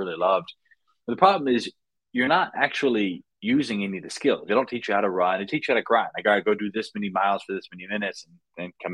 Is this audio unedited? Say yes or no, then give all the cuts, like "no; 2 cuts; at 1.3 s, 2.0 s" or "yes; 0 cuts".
no; 3 cuts; at 4.5 s, 5.5 s, 6.7 s